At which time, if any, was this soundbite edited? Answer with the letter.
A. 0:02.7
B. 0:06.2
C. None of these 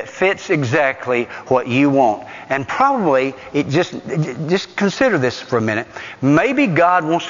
C